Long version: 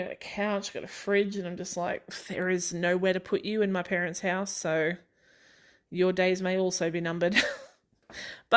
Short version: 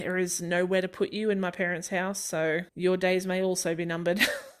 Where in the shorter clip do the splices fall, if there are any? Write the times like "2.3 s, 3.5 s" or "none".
2.7 s